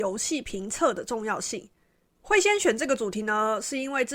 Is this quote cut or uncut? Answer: uncut